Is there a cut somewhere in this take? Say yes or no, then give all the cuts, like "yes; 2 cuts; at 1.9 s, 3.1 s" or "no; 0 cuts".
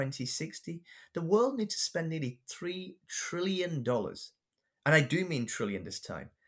no; 0 cuts